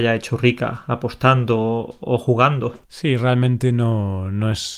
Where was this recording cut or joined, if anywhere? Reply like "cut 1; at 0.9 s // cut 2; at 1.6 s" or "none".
cut 1; at 2.8 s

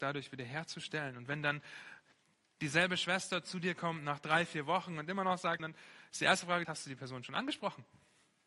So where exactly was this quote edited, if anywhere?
cut 1; at 5.6 s // cut 2; at 6.6 s

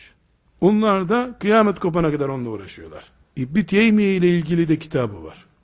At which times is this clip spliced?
cut 1; at 3.2 s

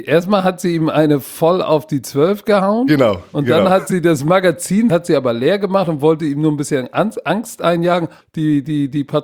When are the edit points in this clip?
cut 1; at 4.9 s // cut 2; at 8.2 s

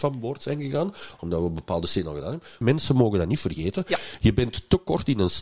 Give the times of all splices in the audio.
cut 1; at 2.6 s

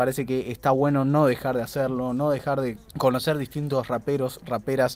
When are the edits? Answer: cut 1; at 2.9 s

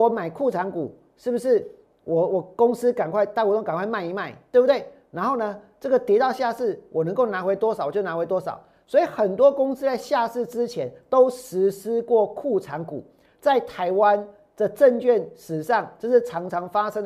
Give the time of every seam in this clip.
none

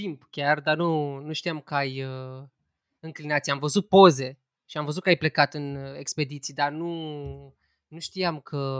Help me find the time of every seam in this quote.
none

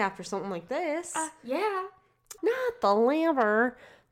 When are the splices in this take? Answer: cut 1; at 2.4 s

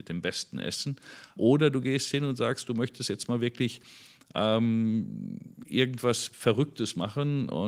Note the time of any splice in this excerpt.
cut 1; at 1.4 s

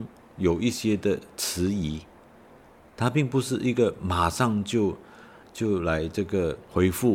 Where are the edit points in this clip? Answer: none

